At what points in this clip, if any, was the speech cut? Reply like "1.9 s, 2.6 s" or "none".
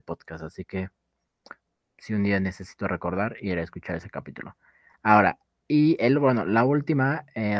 none